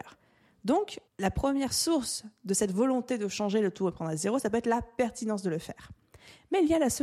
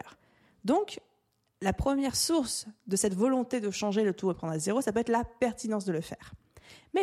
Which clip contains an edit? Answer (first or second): first